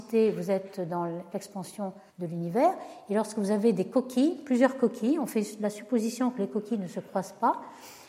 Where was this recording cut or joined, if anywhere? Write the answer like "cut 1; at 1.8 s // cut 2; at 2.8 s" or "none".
cut 1; at 2.1 s

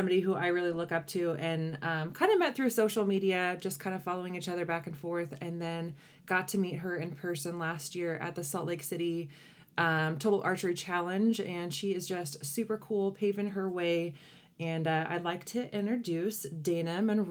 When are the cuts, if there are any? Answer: none

